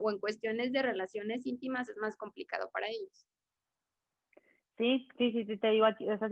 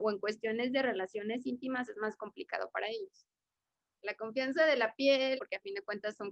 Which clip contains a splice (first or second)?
second